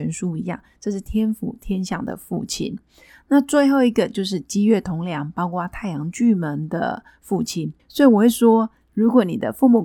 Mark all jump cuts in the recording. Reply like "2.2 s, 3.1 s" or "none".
7.8 s